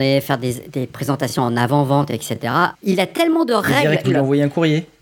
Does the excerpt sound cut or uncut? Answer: cut